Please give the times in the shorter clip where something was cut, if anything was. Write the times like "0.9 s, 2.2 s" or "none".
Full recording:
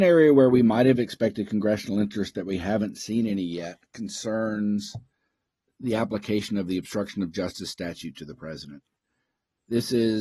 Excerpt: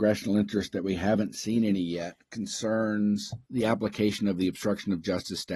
3.4 s